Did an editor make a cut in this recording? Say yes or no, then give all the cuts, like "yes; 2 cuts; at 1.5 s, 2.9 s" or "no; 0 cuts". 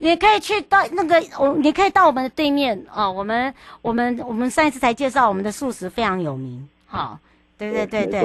no; 0 cuts